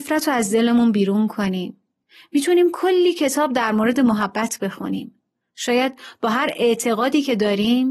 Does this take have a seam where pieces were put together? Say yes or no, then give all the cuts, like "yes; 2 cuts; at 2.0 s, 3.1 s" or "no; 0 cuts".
yes; 1 cut; at 5.5 s